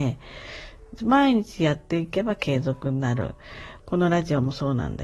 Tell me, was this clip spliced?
yes; 2 cuts; at 1.0 s, 3.8 s

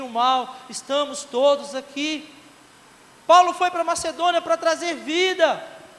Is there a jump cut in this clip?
no; 0 cuts

